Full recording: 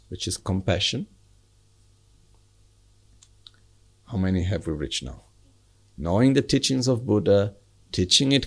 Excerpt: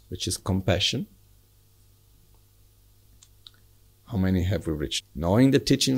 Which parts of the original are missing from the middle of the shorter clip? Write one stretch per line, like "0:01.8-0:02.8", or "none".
0:05.0-0:05.8